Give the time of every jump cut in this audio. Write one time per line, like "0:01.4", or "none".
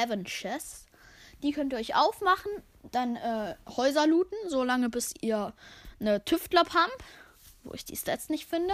none